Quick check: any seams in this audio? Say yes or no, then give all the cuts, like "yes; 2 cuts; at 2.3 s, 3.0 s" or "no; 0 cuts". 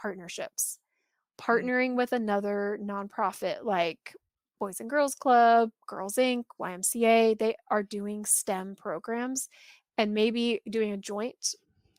no; 0 cuts